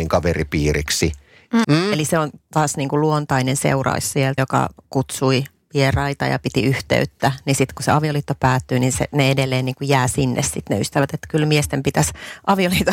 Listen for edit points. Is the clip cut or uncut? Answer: cut